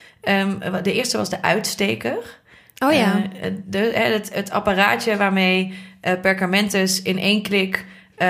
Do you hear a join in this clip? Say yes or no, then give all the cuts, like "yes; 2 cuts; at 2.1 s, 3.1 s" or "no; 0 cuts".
no; 0 cuts